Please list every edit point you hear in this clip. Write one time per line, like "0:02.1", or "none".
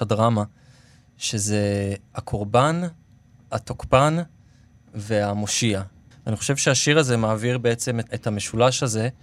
0:06.1
0:08.1